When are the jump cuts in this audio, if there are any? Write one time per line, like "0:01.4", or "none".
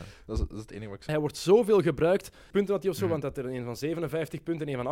0:01.1
0:02.5